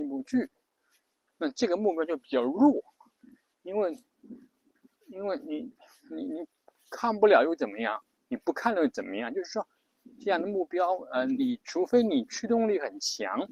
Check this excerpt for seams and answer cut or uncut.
uncut